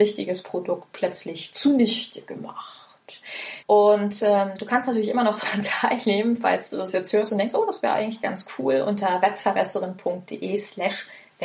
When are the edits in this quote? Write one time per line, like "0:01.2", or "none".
0:03.6